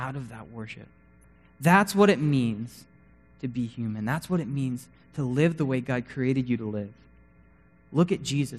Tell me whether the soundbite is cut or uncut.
uncut